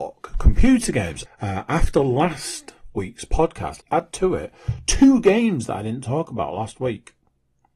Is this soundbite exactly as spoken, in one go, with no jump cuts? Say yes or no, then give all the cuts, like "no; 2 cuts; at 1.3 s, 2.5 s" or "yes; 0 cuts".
no; 2 cuts; at 1.3 s, 3.8 s